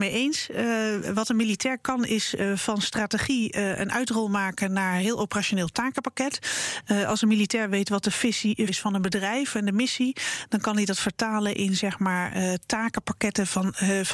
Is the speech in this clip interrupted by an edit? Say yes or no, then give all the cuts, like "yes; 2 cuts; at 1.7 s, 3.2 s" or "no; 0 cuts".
yes; 1 cut; at 8.7 s